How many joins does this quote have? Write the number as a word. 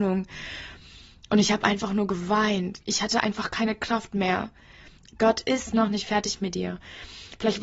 two